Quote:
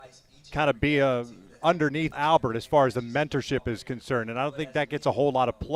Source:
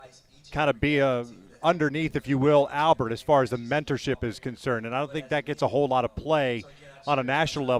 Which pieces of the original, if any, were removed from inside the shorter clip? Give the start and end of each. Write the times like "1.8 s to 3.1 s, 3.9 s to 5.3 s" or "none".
2.1 s to 2.7 s